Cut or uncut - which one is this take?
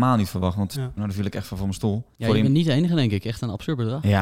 cut